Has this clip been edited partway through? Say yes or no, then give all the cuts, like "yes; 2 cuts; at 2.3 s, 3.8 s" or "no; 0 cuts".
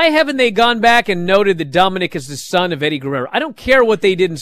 no; 0 cuts